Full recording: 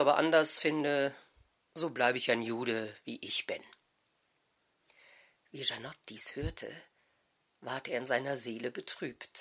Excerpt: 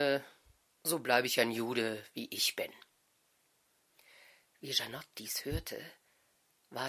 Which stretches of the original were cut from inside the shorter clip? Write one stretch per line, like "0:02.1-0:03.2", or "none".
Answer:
none